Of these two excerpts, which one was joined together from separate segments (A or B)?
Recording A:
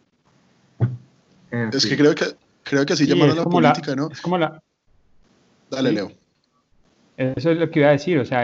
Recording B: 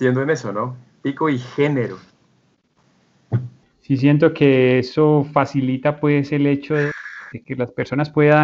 B